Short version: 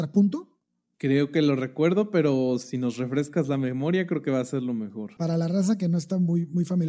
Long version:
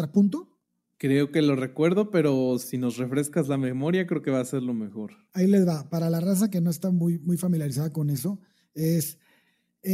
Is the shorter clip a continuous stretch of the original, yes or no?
no